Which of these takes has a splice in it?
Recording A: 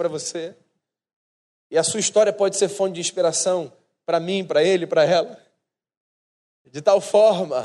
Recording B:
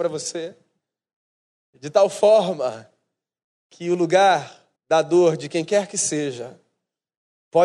B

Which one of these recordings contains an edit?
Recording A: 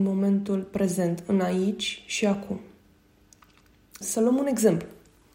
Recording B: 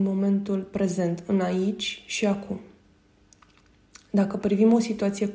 A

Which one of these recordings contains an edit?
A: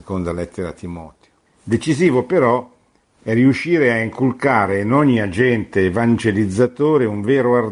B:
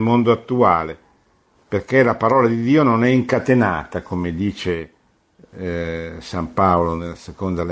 A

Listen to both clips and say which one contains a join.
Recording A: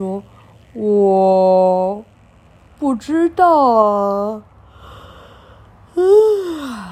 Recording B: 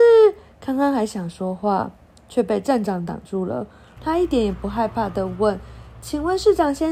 B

